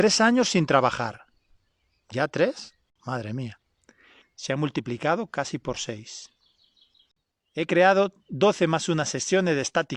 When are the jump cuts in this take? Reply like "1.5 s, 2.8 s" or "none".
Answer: 4.2 s